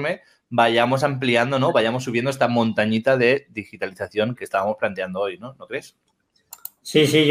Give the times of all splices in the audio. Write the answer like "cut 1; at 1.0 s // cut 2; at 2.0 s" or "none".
cut 1; at 4.4 s

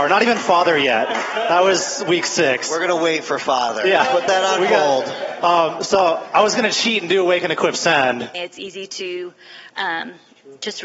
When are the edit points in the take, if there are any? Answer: cut 1; at 5.4 s // cut 2; at 8.3 s

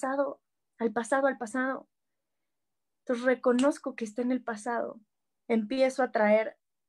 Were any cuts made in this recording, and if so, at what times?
cut 1; at 5.4 s

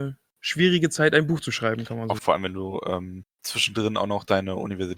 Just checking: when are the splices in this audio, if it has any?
cut 1; at 2.2 s

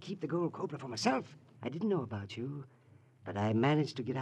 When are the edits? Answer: cut 1; at 1.6 s

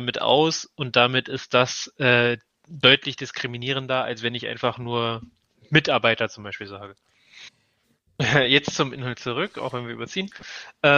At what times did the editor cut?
cut 1; at 7.8 s

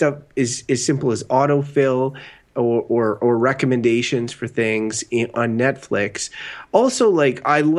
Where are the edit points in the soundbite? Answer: cut 1; at 5.3 s

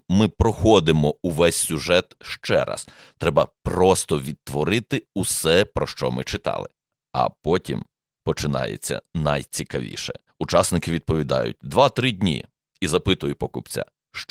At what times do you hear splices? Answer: cut 1; at 10.3 s // cut 2; at 12.6 s

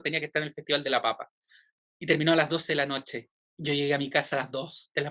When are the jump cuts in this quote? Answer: none

